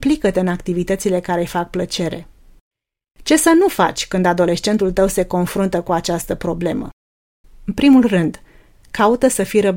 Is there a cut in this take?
yes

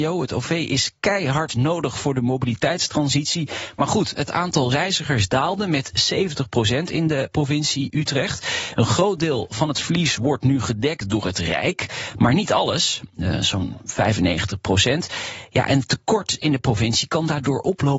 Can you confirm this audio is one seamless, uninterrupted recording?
no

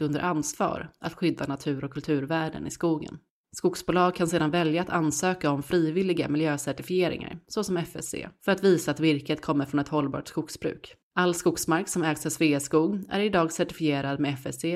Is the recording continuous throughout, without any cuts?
yes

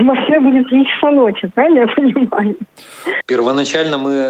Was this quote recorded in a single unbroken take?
no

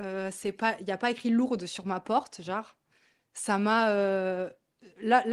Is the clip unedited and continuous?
yes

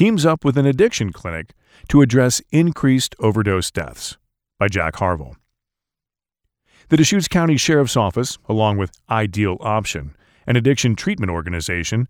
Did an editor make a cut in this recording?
no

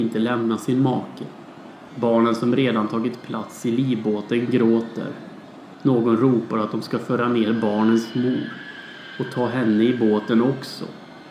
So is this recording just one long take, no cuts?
no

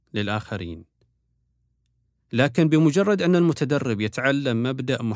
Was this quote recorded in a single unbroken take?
yes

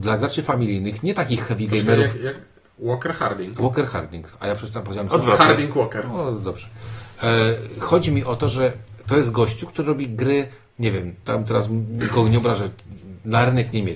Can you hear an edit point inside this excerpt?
yes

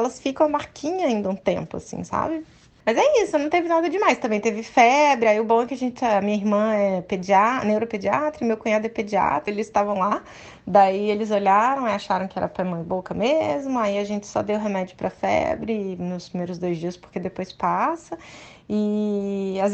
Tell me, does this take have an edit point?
yes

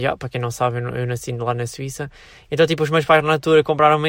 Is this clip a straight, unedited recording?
yes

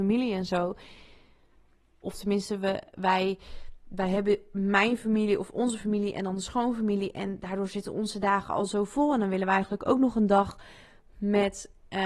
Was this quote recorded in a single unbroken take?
no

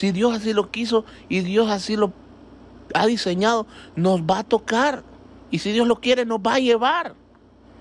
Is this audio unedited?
yes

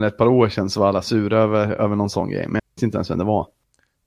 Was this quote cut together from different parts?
no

